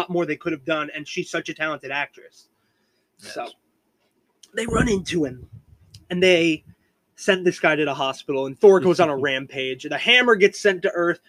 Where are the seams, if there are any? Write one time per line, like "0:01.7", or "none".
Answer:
none